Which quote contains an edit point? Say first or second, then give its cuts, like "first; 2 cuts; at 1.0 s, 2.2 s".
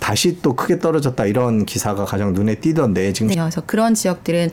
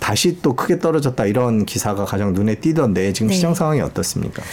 first; 1 cut; at 3.3 s